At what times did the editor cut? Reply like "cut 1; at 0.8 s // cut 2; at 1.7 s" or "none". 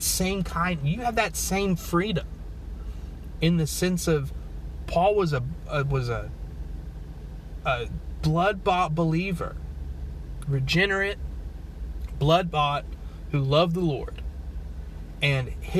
cut 1; at 3.4 s